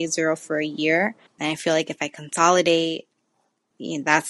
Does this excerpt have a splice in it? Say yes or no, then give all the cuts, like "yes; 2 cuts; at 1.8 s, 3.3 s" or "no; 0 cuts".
yes; 1 cut; at 1.3 s